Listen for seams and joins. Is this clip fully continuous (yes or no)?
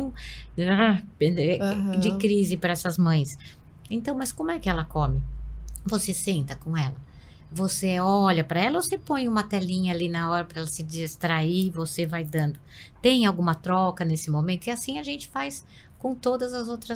yes